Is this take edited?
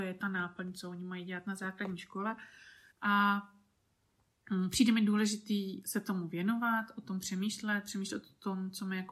yes; 1 cut; at 2.9 s

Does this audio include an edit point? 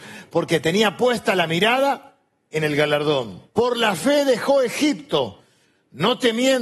yes; 1 cut; at 3.5 s

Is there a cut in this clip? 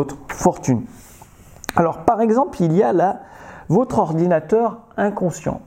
no; 0 cuts

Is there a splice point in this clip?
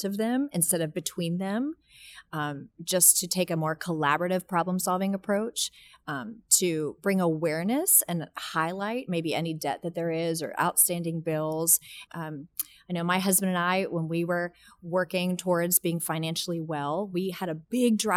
yes; 1 cut; at 12.1 s

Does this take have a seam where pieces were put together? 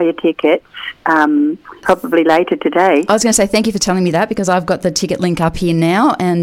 yes; 1 cut; at 1.8 s

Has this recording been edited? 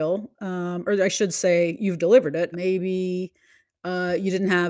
yes; 1 cut; at 2.5 s

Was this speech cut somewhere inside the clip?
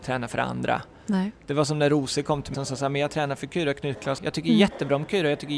yes; 2 cuts; at 2.5 s, 4.2 s

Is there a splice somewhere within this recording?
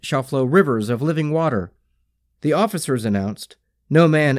yes; 1 cut; at 2.4 s

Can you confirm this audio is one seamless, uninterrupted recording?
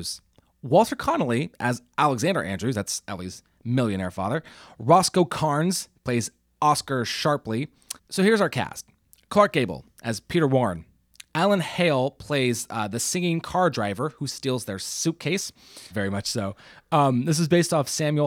no; 3 cuts; at 8.0 s, 11.3 s, 15.9 s

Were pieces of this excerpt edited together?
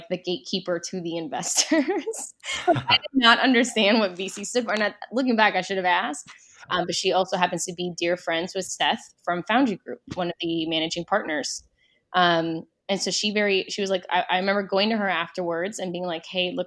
yes; 1 cut; at 6.7 s

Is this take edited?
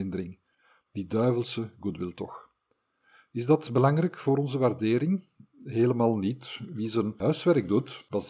no; 0 cuts

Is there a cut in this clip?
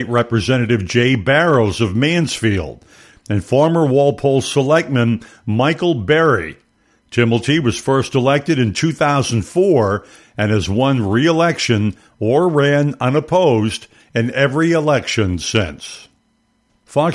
yes; 1 cut; at 3.1 s

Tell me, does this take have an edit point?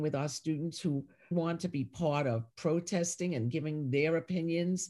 yes; 1 cut; at 1.3 s

